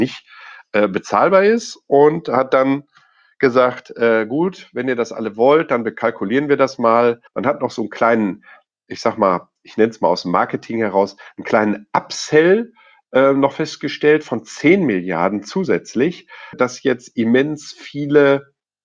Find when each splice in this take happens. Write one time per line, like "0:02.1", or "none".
0:07.3
0:16.5